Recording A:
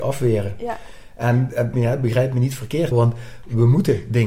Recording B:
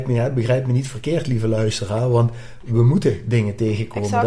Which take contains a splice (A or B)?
A